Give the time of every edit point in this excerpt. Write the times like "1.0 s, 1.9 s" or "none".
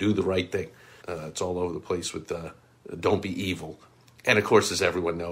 1.0 s